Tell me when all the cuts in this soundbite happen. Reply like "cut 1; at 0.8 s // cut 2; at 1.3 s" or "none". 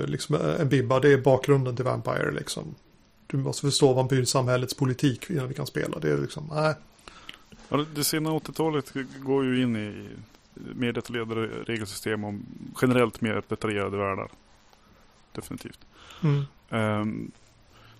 cut 1; at 12.7 s